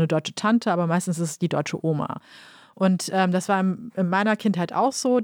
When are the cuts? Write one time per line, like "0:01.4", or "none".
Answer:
none

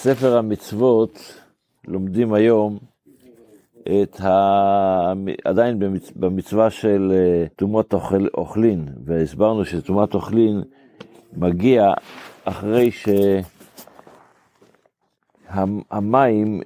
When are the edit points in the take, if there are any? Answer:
0:07.5
0:12.4

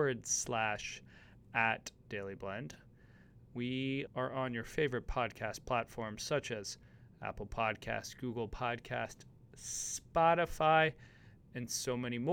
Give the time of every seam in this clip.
0:04.1

